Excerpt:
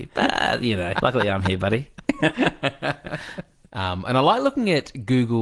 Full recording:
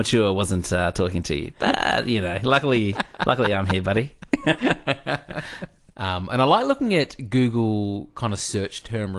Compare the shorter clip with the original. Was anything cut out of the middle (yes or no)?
yes